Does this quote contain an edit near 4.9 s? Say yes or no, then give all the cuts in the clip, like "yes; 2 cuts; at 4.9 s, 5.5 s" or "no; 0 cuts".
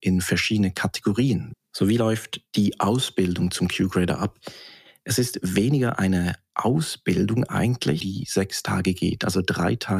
no; 2 cuts; at 1.5 s, 8.0 s